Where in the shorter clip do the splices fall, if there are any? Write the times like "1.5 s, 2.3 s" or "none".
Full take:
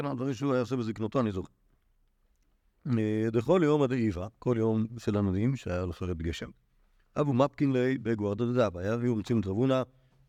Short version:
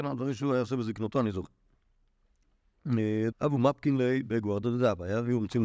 3.3 s